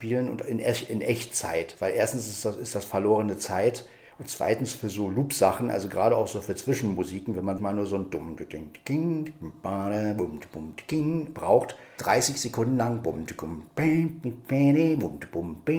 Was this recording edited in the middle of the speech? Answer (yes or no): yes